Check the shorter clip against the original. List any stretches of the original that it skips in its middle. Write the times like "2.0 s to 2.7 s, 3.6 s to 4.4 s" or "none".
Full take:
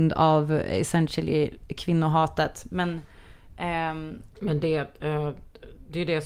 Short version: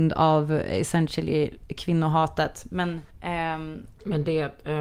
3.1 s to 3.5 s